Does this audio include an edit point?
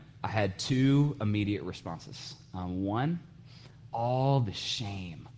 yes; 1 cut; at 3.9 s

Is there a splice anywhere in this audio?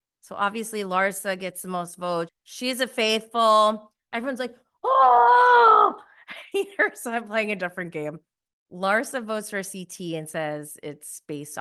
yes; 3 cuts; at 2.3 s, 4.1 s, 6.5 s

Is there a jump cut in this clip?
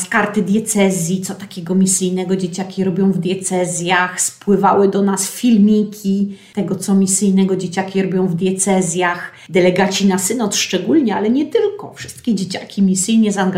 no; 0 cuts

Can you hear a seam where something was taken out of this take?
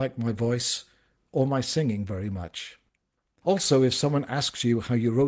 yes; 1 cut; at 3.4 s

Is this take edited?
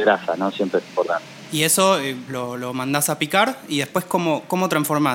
yes; 1 cut; at 2.3 s

